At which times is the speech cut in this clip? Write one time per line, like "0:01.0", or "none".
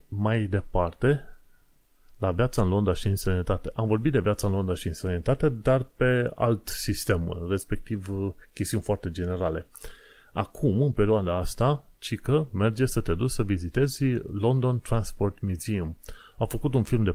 none